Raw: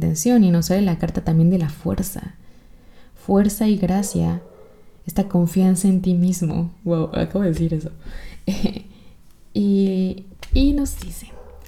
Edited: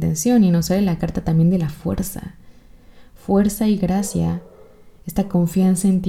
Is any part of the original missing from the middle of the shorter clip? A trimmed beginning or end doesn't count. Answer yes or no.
no